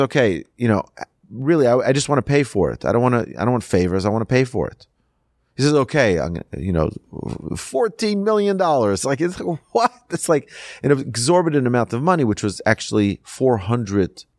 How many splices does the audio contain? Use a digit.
0